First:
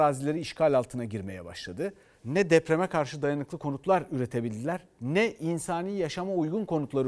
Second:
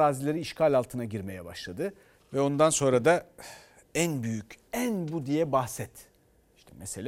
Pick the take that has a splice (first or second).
second